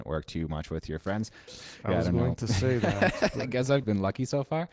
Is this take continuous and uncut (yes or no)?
no